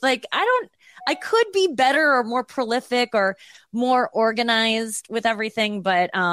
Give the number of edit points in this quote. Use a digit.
0